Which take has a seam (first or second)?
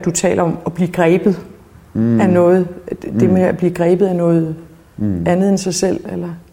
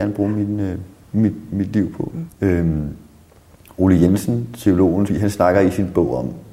second